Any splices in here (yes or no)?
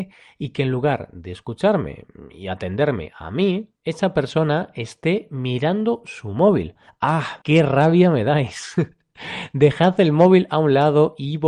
yes